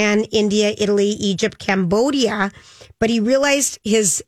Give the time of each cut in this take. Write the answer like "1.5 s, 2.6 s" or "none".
none